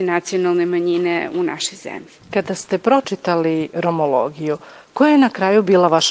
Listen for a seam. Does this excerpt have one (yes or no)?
no